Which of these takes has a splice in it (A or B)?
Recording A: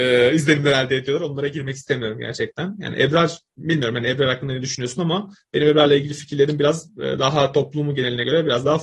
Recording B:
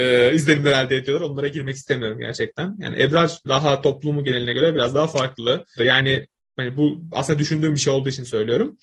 B